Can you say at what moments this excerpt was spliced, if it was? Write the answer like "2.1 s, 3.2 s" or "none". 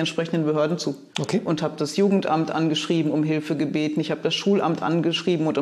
1.1 s